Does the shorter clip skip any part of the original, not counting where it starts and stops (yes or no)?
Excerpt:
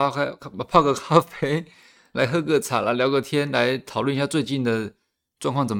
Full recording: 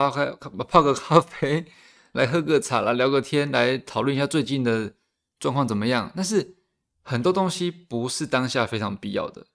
no